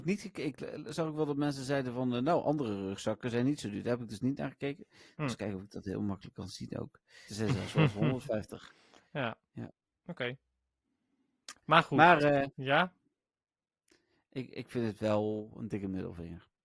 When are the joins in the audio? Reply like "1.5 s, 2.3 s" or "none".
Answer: 7.3 s